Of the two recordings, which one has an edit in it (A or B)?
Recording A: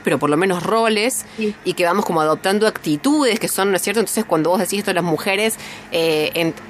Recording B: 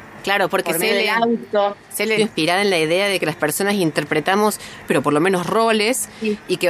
B